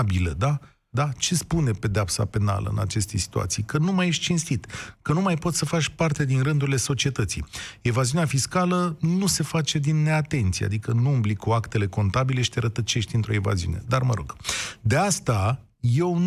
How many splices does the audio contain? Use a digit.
1